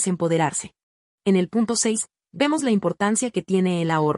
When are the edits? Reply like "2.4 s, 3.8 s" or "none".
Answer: 1.1 s